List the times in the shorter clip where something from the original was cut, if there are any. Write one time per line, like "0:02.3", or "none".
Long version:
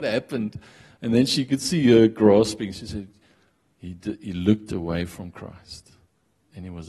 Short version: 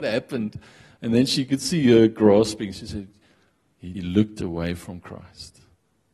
0:03.9